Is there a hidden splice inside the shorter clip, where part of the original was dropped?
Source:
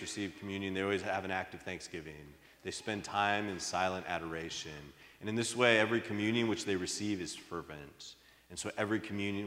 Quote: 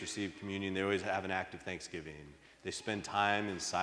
no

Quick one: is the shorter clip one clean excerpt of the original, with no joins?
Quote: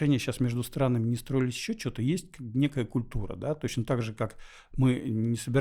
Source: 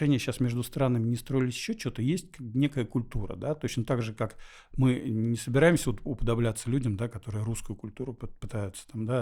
yes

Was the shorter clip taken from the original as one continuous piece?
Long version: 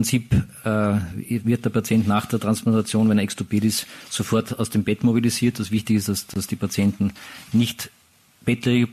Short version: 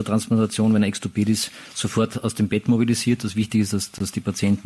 yes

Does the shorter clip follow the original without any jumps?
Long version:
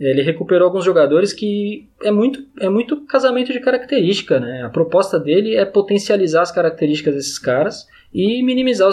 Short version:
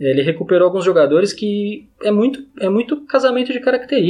yes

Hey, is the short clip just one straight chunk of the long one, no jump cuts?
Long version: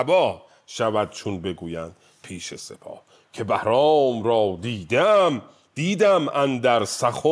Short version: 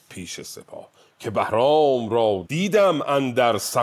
no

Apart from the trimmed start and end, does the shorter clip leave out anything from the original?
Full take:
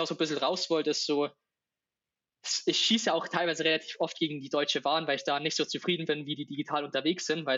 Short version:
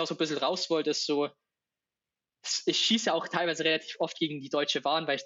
no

